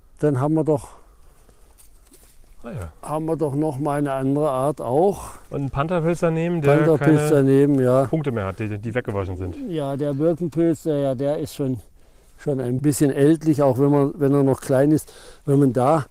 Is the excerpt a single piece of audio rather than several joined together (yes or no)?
yes